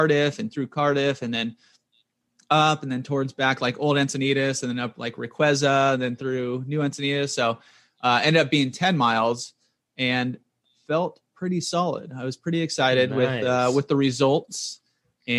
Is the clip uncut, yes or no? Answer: yes